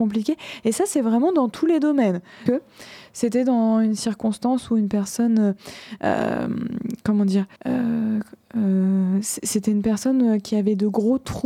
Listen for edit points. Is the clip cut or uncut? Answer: cut